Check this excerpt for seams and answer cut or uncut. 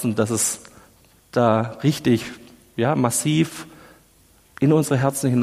uncut